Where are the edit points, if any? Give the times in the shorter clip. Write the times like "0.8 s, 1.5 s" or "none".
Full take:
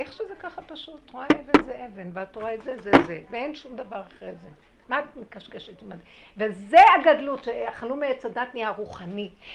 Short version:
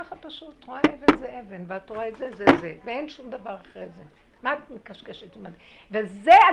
none